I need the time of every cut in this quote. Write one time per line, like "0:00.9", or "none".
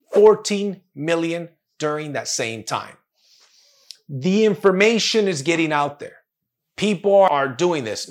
none

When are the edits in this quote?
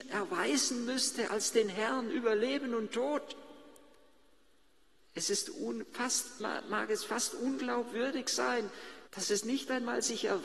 0:05.0
0:06.4
0:09.1

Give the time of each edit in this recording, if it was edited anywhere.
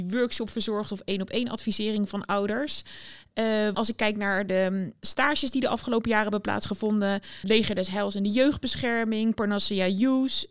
0:03.7
0:07.4

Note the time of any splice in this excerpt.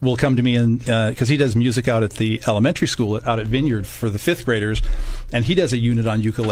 none

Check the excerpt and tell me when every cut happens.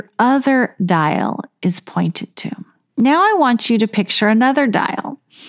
0:02.9

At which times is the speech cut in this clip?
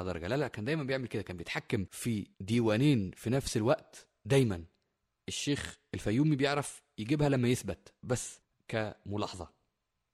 0:02.3

